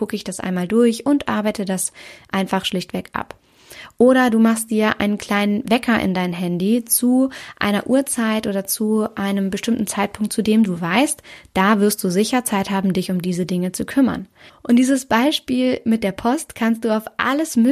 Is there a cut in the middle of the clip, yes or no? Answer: yes